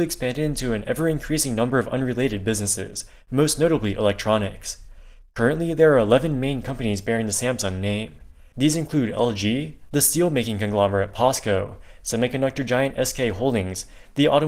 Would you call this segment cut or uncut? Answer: cut